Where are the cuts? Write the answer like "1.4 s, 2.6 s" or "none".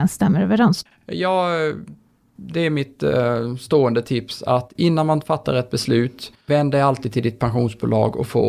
none